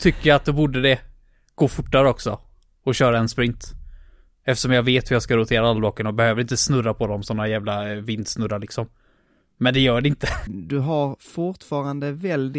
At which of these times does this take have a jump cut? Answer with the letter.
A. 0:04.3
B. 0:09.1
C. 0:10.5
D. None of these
C